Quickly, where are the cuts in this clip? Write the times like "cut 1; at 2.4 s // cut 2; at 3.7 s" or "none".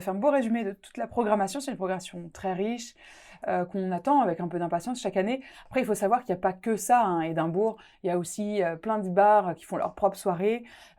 none